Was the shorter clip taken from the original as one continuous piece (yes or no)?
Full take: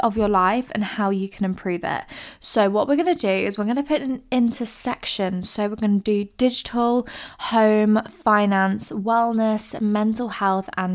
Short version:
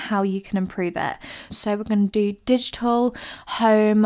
no